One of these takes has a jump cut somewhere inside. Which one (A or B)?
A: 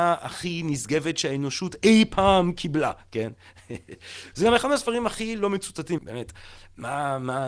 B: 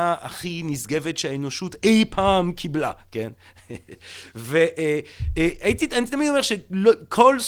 A